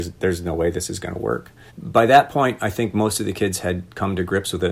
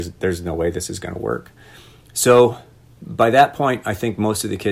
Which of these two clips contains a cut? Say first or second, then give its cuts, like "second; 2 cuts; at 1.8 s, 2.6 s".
first; 1 cut; at 1.7 s